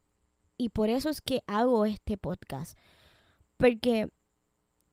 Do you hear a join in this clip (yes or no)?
no